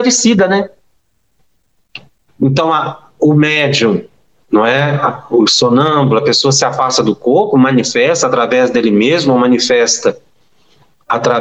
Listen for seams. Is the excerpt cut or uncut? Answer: cut